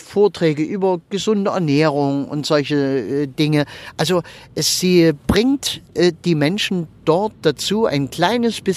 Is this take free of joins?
yes; 0 cuts

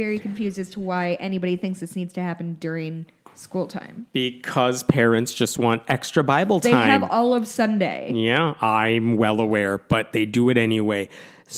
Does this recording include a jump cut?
no; 0 cuts

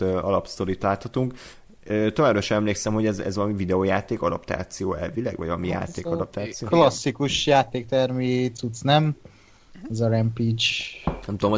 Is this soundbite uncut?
yes; 0 cuts

